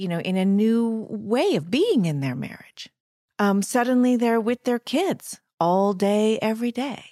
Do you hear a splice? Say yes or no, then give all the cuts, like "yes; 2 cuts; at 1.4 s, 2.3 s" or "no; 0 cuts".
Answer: no; 0 cuts